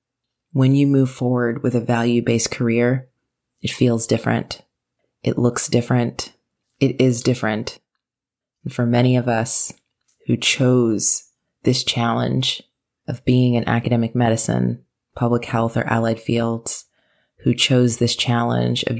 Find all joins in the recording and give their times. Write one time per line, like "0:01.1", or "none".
none